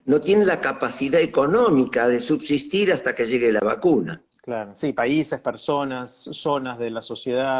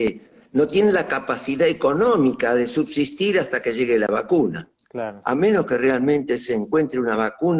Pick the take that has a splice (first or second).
second